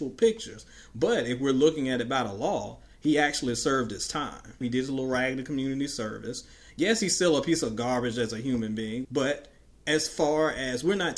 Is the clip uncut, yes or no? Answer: no